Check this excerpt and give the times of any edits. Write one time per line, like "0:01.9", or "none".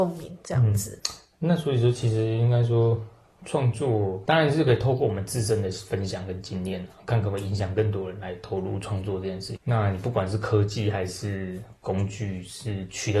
0:09.6